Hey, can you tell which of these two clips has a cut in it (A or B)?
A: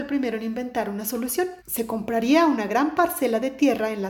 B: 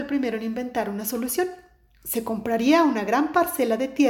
A